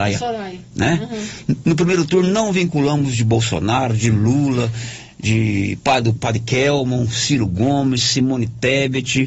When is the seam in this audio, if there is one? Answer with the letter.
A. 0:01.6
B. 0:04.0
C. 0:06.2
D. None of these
C